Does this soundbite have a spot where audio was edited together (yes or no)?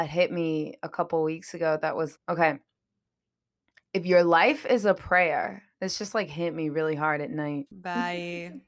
yes